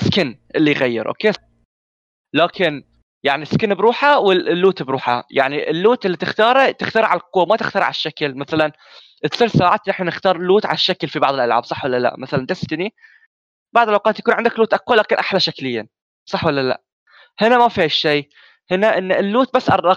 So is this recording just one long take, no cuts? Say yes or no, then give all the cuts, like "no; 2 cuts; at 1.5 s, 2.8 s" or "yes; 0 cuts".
no; 1 cut; at 1.4 s